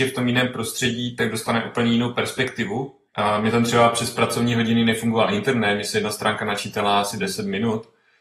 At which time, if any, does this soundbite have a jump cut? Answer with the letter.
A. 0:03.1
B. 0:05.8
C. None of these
A